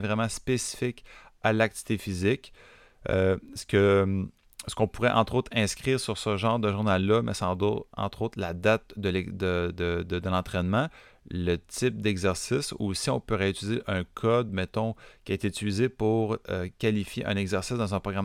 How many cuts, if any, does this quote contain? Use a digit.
0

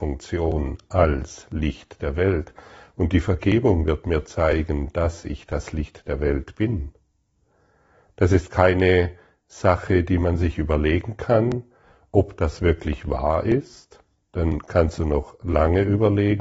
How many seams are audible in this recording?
0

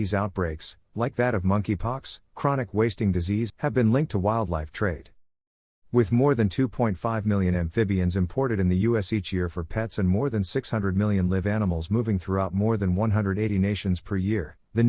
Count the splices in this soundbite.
1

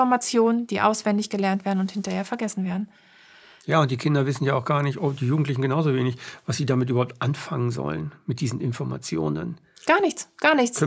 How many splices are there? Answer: 0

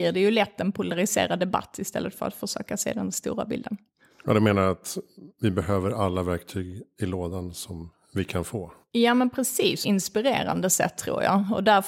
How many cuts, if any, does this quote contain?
1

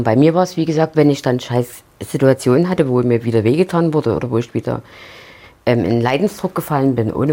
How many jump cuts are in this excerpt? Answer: 1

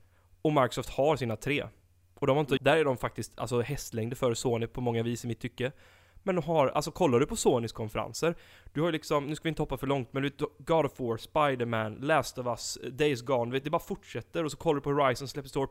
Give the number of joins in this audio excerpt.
1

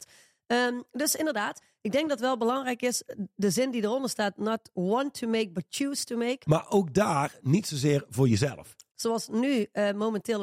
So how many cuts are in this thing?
2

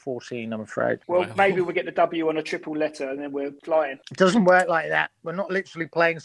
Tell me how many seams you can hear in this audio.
0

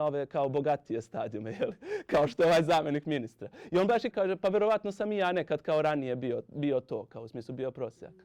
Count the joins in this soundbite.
1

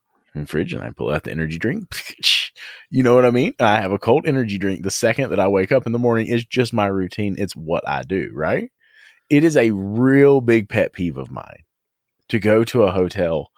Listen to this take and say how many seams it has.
0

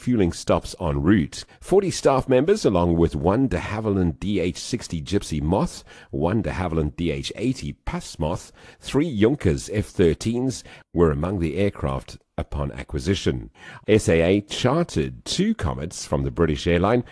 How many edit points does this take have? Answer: 3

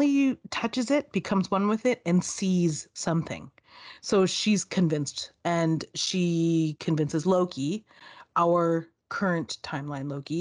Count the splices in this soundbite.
0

